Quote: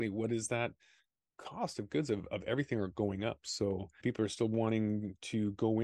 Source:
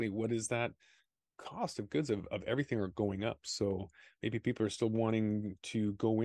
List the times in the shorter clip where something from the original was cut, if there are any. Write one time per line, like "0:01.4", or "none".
0:04.0